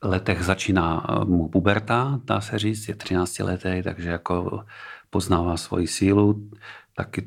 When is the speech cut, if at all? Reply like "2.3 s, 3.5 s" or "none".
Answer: none